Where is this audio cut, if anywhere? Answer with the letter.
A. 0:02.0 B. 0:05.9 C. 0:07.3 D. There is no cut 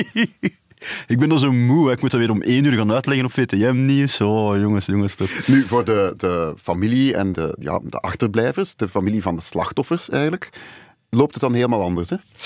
C